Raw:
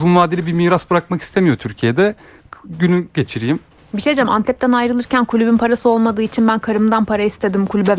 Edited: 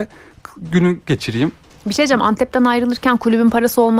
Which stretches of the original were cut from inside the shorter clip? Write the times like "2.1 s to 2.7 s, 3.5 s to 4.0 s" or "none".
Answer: none